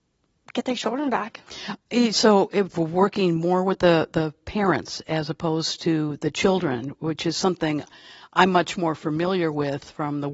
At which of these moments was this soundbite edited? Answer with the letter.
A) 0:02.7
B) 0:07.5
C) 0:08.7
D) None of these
A